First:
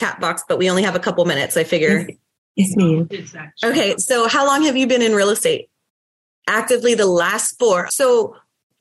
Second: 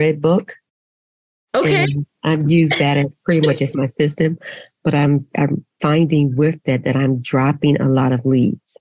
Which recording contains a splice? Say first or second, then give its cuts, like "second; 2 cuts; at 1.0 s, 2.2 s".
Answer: first; 2 cuts; at 6.2 s, 7.9 s